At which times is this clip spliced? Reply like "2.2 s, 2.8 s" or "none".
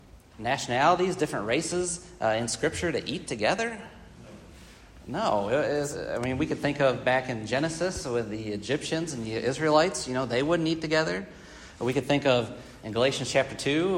none